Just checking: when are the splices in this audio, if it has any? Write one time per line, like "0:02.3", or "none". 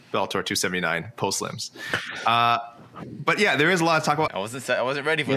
0:04.3